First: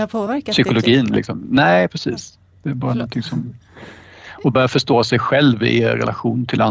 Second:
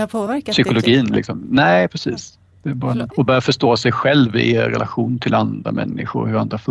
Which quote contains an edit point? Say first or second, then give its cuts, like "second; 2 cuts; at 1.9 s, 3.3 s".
second; 1 cut; at 3.1 s